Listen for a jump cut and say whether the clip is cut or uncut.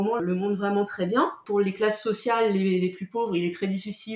uncut